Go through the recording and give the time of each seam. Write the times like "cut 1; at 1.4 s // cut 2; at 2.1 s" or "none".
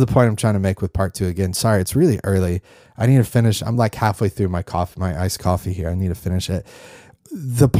none